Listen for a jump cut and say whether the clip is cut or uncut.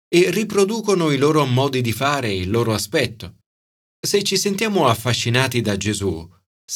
uncut